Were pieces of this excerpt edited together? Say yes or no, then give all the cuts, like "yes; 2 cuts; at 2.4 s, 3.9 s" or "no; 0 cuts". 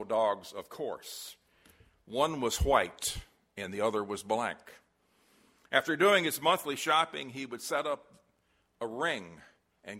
no; 0 cuts